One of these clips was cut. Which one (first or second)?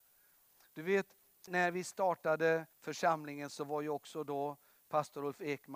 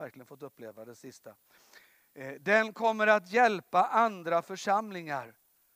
first